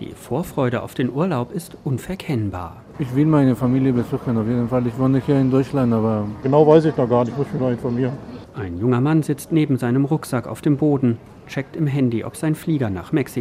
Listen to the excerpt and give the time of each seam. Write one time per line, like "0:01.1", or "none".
0:02.9
0:06.4
0:08.4